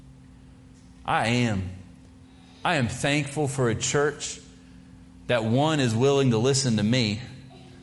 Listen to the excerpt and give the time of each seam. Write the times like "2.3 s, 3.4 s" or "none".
none